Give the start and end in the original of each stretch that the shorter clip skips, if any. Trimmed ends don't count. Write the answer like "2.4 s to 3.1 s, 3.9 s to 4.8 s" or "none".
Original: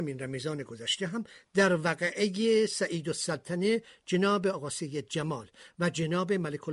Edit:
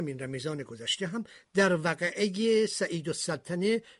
none